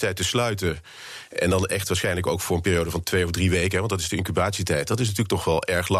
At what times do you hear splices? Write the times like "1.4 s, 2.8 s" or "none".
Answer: none